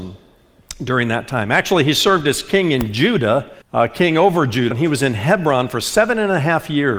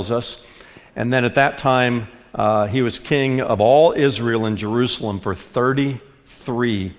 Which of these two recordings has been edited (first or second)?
first